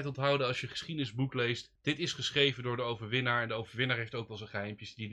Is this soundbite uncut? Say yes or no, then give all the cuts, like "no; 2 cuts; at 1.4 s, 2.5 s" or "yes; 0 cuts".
yes; 0 cuts